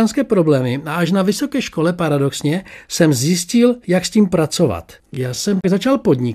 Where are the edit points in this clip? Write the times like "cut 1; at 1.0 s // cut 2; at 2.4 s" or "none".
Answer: none